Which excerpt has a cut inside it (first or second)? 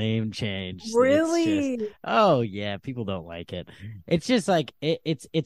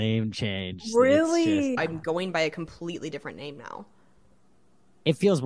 second